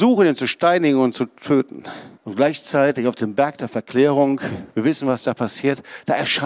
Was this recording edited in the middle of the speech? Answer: yes; 1 cut; at 2.2 s

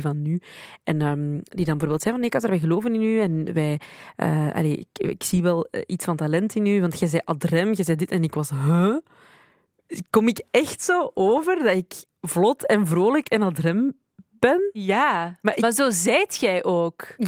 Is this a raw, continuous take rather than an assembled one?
yes; 0 cuts

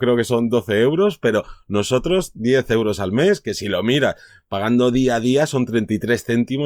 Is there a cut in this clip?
no; 0 cuts

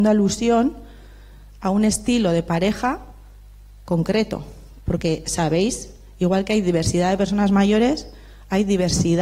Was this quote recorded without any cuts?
yes; 0 cuts

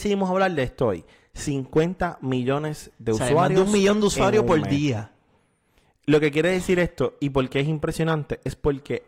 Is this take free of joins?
yes; 0 cuts

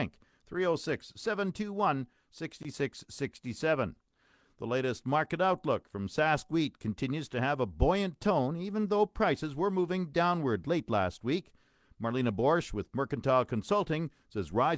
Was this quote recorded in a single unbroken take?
yes; 0 cuts

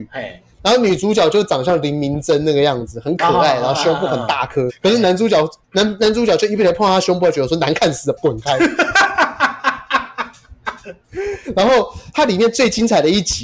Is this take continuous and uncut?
no; 3 cuts; at 4.7 s, 8.2 s, 11.0 s

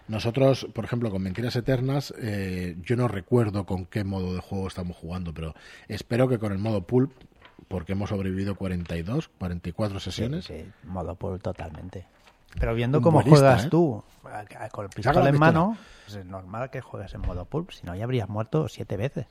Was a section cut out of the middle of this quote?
yes; 2 cuts; at 12.5 s, 16.1 s

